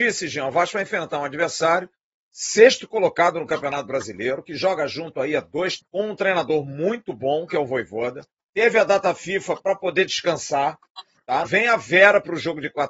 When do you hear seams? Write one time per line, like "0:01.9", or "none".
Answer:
0:05.8
0:08.4
0:11.5

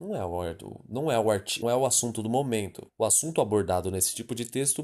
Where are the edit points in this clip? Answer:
0:01.6
0:02.9

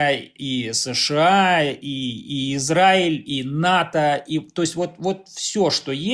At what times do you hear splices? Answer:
none

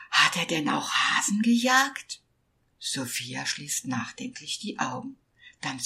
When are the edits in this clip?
0:02.7

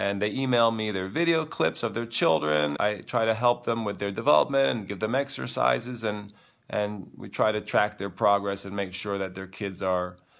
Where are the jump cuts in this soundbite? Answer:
0:02.8

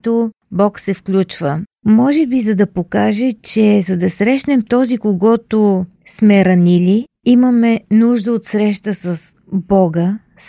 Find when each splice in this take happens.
none

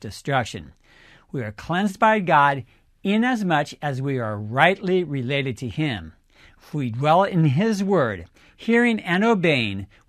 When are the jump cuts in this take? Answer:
none

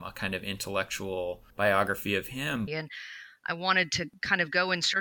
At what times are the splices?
0:01.5
0:02.7

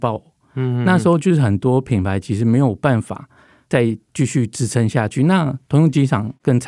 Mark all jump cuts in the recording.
none

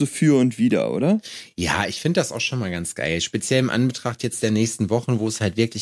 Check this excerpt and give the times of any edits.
none

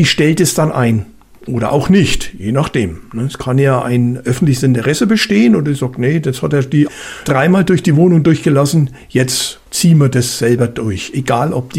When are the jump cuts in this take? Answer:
0:07.2

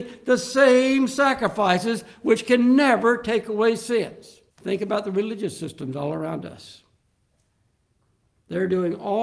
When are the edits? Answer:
0:04.5

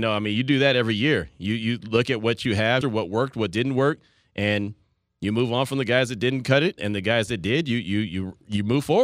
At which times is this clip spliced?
0:02.8
0:06.8

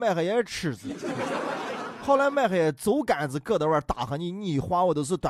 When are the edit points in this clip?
none

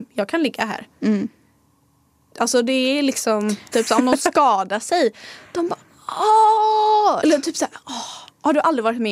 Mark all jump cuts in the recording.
0:03.7
0:07.2

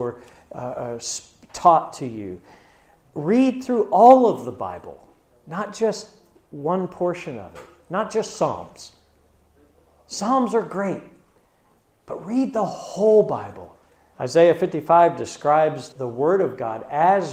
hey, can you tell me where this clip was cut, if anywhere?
0:14.1
0:15.9

